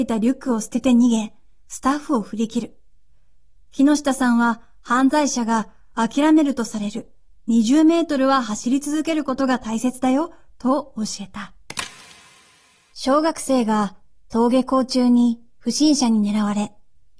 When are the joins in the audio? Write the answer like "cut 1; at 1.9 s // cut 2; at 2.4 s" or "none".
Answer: cut 1; at 12.9 s